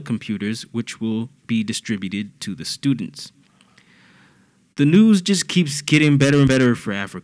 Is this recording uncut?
yes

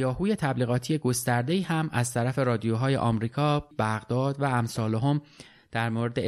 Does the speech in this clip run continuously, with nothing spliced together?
no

